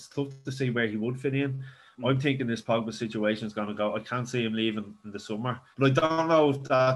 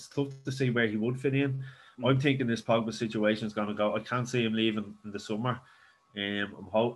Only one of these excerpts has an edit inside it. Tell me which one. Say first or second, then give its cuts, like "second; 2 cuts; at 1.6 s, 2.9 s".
first; 1 cut; at 5.7 s